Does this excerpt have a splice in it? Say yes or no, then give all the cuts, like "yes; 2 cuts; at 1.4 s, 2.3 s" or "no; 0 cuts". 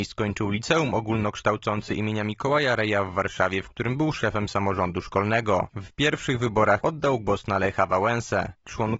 yes; 1 cut; at 6.8 s